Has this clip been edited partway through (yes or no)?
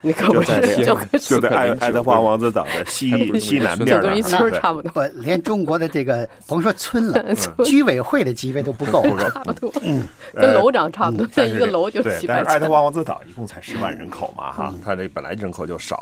no